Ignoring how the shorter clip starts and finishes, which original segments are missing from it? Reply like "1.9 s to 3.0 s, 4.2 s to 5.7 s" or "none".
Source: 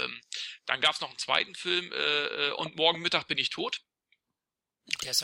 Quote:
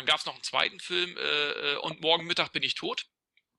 none